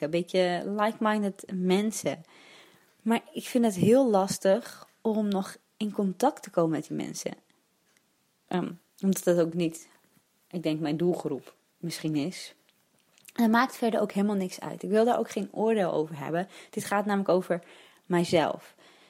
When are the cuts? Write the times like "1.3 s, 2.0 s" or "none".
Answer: 8.5 s